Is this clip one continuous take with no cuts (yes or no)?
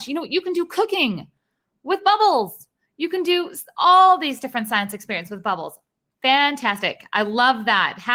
yes